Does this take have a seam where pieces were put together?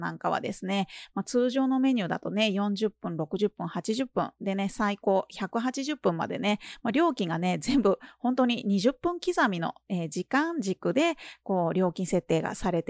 no; 0 cuts

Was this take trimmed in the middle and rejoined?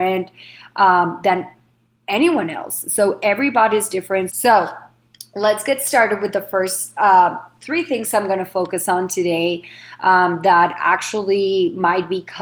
yes; 1 cut; at 4.3 s

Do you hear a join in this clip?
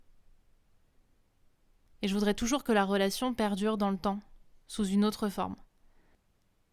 no; 0 cuts

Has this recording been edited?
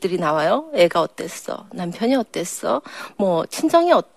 no; 0 cuts

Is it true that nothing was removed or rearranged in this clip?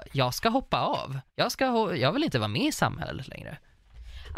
no; 1 cut; at 1.3 s

